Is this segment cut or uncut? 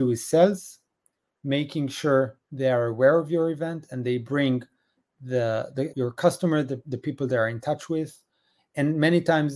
cut